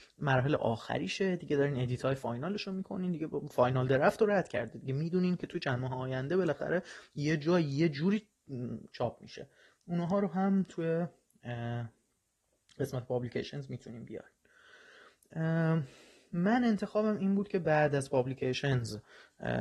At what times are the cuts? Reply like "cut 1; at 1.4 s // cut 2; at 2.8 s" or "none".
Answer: none